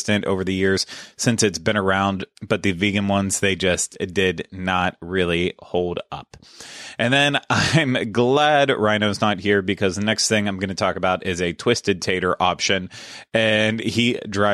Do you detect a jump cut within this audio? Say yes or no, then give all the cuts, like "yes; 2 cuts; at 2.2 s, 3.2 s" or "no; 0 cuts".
yes; 1 cut; at 2.3 s